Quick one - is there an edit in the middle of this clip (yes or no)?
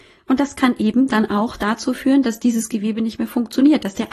no